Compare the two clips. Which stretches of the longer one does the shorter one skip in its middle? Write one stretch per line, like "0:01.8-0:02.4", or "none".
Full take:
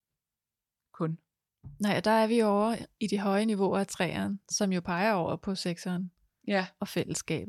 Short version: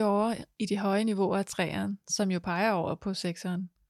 none